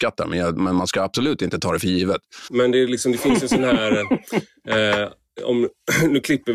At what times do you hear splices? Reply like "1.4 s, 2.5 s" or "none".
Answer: 2.5 s